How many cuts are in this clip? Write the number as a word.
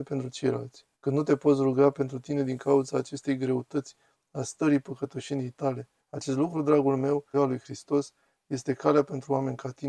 three